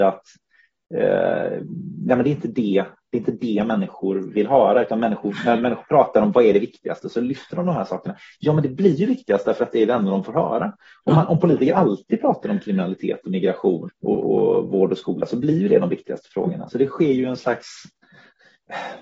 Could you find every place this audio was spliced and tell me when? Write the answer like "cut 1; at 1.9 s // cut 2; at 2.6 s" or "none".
cut 1; at 13.9 s // cut 2; at 16.7 s